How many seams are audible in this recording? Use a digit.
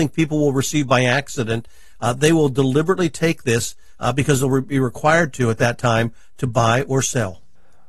0